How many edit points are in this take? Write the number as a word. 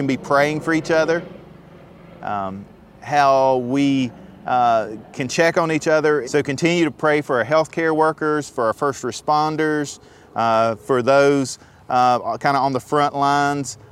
one